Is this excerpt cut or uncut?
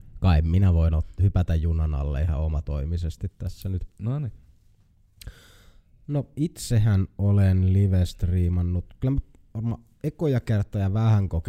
uncut